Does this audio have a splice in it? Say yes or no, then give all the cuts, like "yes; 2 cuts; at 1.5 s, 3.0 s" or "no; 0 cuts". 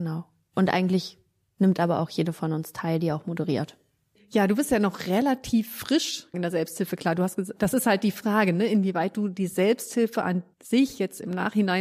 yes; 3 cuts; at 6.3 s, 7.6 s, 10.5 s